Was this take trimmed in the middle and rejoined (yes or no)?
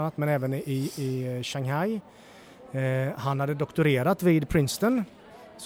no